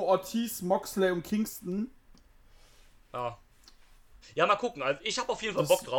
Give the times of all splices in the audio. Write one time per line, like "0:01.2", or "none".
0:04.2